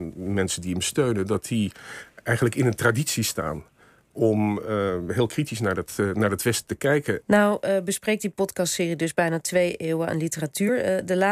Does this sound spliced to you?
yes; 1 cut; at 7.2 s

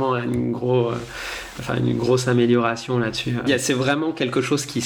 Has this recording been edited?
yes; 1 cut; at 3.5 s

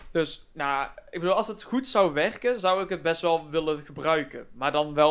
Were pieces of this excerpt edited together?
no; 0 cuts

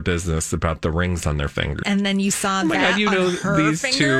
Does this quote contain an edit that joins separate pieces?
yes; 1 cut; at 1.8 s

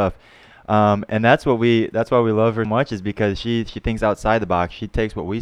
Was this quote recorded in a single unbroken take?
no; 1 cut; at 2.7 s

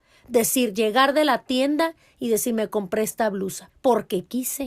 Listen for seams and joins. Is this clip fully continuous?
no; 1 cut; at 3.7 s

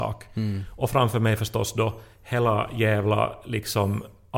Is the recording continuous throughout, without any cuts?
yes; 0 cuts

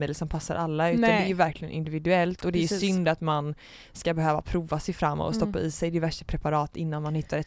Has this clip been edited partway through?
no; 0 cuts

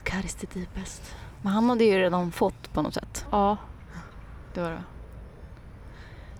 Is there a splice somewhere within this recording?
yes; 2 cuts; at 1.4 s, 3.2 s

